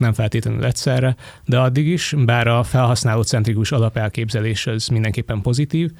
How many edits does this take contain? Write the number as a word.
one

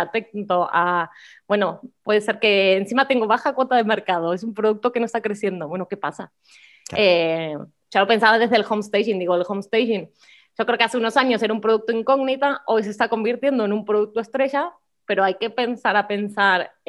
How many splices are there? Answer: zero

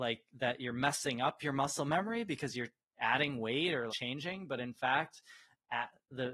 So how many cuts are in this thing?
one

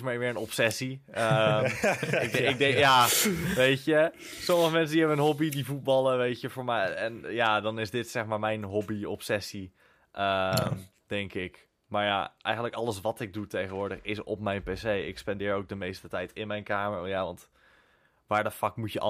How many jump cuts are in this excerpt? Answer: zero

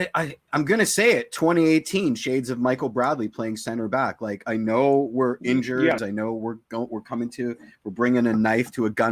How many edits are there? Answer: one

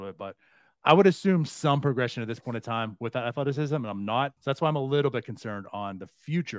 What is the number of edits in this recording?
one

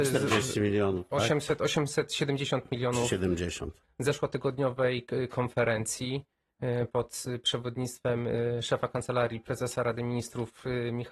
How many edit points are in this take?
one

